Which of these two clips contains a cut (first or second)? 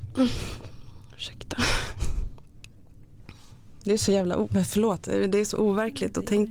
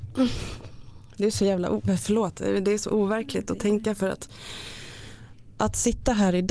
second